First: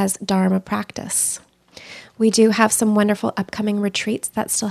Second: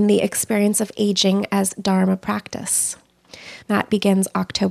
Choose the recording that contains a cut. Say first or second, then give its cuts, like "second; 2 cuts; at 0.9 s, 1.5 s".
second; 1 cut; at 3.6 s